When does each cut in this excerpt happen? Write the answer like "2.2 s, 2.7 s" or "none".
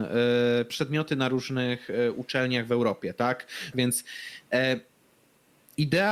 3.7 s